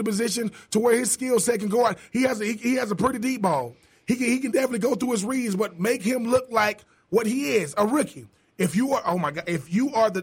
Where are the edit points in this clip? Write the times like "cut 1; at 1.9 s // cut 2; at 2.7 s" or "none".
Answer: none